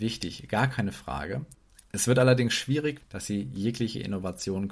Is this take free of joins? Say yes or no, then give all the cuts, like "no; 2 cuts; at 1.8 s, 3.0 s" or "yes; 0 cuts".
no; 1 cut; at 3.0 s